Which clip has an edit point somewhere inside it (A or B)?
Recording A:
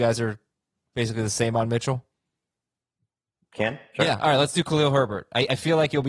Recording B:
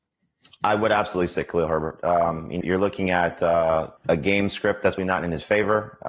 B